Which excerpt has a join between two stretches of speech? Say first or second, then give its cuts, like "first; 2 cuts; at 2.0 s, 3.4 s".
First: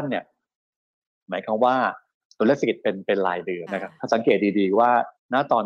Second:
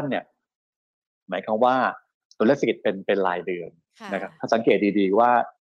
first; 1 cut; at 3.7 s